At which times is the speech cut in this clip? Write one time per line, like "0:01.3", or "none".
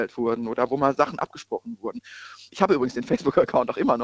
0:02.5